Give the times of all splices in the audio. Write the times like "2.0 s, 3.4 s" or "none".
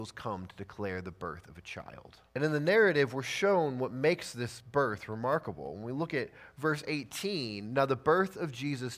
2.3 s